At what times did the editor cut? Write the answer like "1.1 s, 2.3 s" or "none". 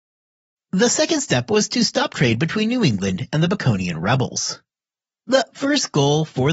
5.1 s